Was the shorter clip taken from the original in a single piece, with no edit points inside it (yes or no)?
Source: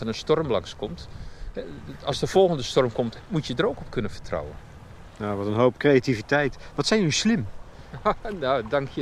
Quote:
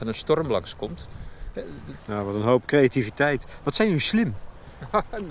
no